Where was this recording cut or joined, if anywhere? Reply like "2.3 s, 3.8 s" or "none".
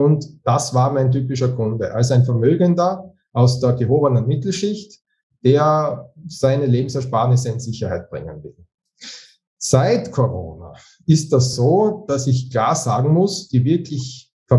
none